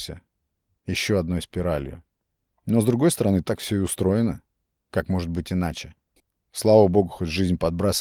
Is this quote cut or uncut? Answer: uncut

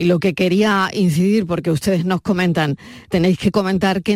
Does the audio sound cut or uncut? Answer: uncut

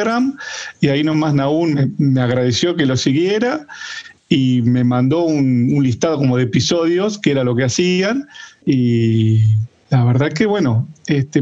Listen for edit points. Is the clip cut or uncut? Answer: cut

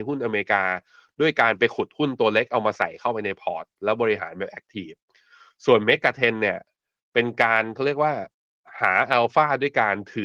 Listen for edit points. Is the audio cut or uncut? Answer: uncut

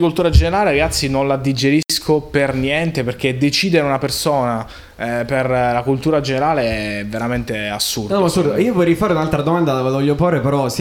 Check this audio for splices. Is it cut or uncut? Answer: uncut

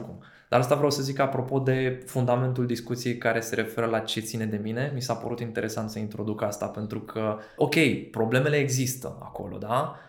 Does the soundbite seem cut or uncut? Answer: cut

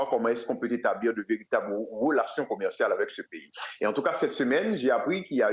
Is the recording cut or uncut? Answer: uncut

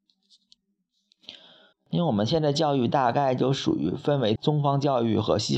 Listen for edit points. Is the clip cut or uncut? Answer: cut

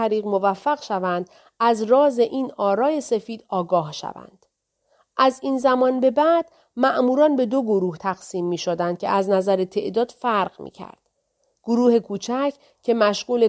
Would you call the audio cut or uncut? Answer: uncut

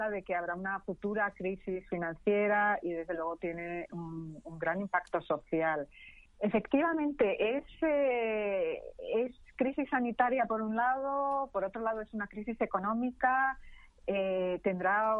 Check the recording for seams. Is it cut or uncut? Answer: cut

